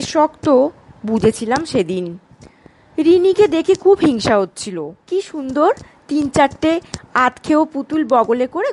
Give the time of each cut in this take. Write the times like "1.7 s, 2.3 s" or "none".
5.0 s